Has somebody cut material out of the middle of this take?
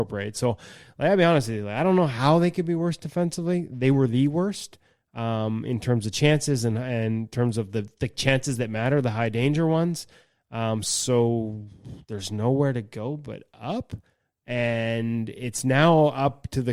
no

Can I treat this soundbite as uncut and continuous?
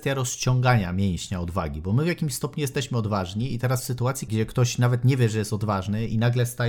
no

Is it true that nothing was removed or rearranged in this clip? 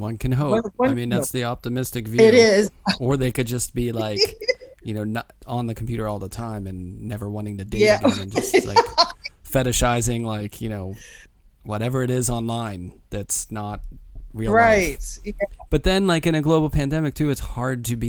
yes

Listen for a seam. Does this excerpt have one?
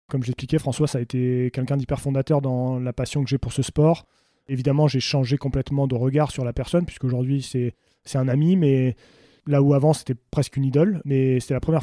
no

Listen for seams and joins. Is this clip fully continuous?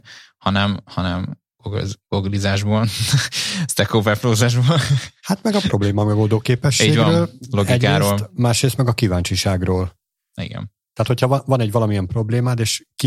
yes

